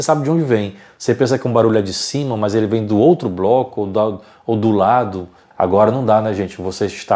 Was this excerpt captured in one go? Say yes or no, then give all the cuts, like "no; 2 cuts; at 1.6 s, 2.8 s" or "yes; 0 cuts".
no; 1 cut; at 5.5 s